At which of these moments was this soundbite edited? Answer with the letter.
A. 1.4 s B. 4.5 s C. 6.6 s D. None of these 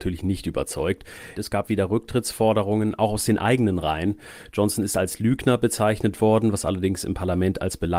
A